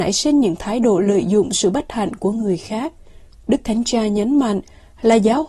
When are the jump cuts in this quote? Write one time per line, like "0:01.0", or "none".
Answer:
0:03.3

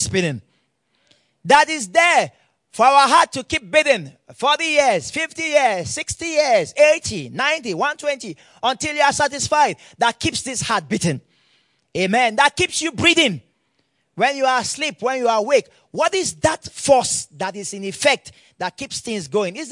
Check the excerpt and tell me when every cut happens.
none

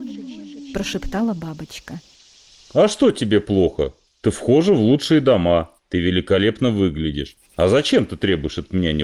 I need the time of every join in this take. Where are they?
0:05.8
0:07.4

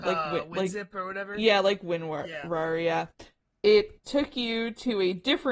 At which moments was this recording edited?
none

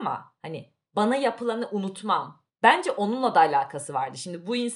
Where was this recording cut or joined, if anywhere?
0:02.5

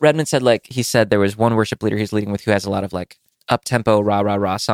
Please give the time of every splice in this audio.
none

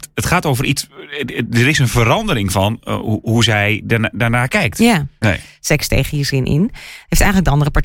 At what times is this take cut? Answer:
0:05.2

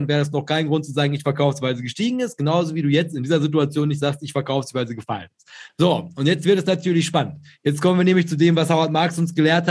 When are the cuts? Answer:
0:05.7

